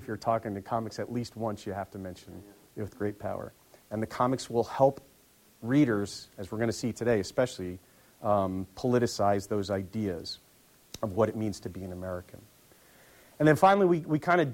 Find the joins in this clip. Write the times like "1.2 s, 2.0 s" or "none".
3.8 s